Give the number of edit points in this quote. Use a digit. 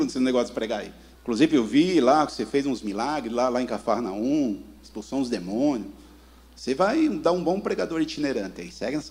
1